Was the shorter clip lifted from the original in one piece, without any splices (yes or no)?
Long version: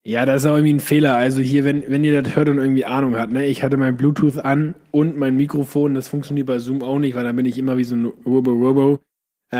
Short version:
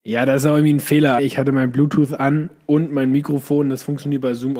no